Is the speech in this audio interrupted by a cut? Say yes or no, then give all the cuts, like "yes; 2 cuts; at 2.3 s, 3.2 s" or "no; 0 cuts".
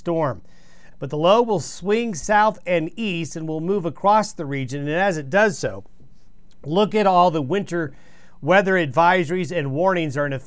yes; 1 cut; at 0.9 s